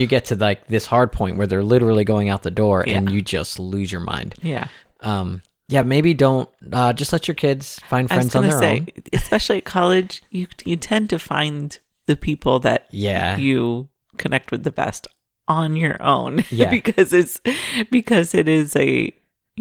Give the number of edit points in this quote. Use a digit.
0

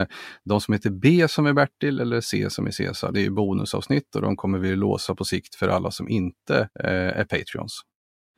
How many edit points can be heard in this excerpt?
2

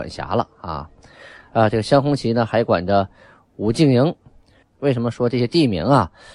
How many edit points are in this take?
1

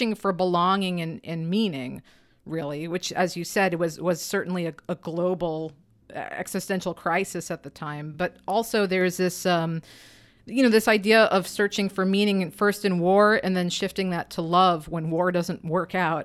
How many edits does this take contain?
0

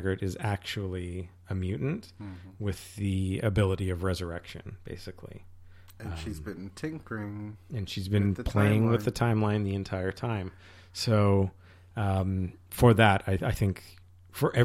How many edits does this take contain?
0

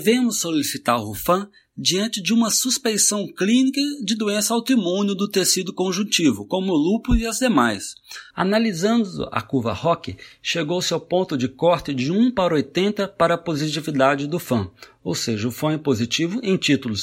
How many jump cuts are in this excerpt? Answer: 1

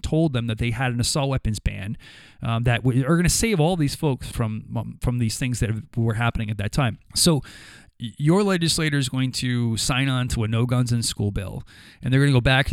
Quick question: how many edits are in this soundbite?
2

